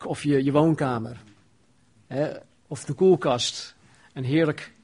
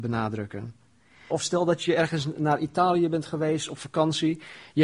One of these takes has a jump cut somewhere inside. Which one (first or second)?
second